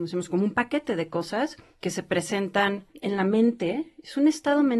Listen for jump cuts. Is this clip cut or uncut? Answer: uncut